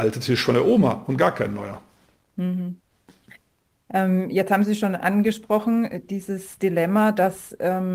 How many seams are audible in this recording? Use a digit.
0